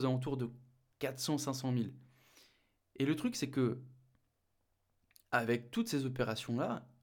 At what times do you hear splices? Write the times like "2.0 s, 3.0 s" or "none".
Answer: none